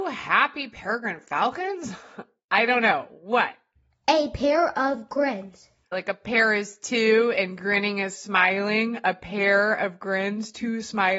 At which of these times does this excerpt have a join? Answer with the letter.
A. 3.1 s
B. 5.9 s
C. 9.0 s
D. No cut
B